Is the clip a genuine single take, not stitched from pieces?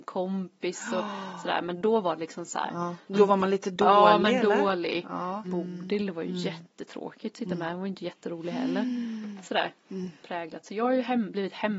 no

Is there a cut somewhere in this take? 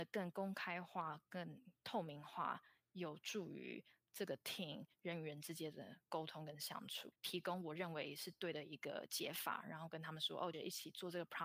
yes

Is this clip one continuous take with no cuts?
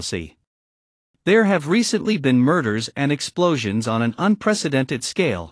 yes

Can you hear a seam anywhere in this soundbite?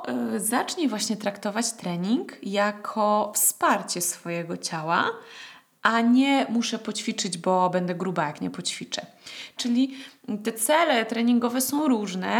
yes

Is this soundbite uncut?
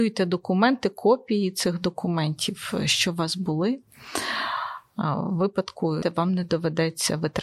no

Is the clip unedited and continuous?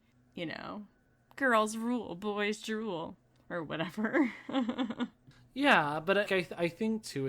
no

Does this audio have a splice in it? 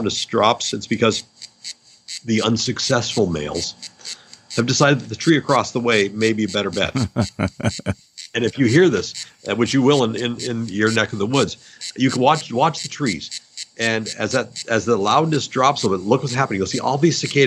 no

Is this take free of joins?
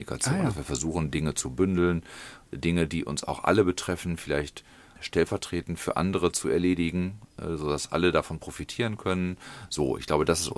yes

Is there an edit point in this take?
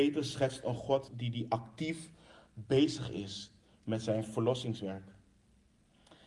yes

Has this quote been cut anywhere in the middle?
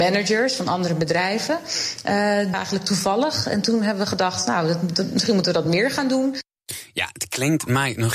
yes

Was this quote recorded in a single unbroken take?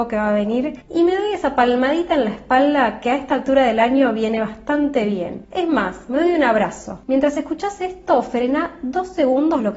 yes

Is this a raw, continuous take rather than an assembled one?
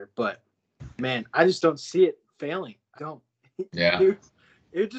no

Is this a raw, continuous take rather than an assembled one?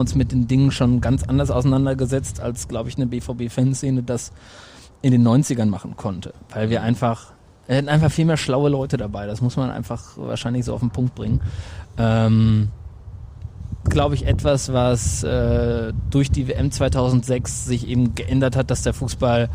no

